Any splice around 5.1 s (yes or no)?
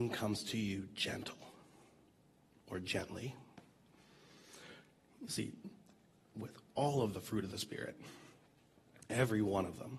no